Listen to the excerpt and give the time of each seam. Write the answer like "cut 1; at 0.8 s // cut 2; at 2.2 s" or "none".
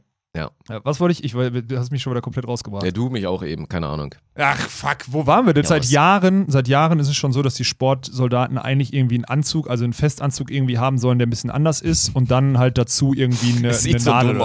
cut 1; at 5.6 s